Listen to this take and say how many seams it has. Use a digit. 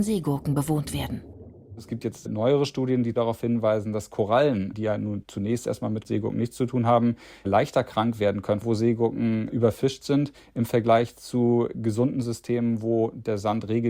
1